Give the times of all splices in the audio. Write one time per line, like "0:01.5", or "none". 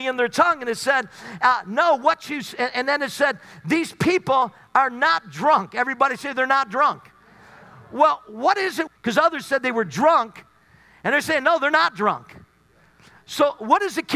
0:08.9